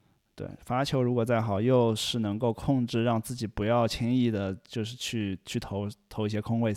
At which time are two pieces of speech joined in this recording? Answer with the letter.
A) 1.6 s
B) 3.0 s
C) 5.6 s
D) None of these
D